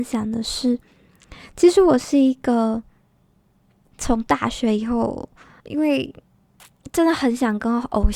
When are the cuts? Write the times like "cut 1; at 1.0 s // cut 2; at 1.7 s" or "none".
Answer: cut 1; at 5.6 s